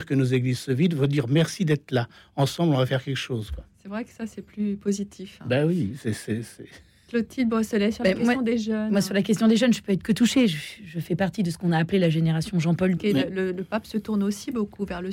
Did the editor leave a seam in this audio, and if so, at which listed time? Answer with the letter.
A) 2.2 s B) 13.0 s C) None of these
B